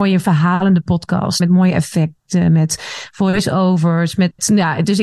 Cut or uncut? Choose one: cut